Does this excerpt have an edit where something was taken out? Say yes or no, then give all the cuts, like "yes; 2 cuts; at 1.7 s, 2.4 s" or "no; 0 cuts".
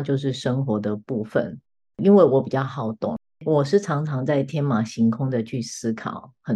no; 0 cuts